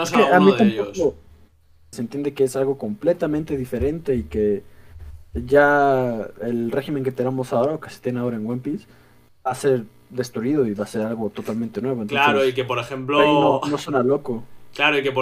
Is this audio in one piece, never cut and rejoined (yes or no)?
no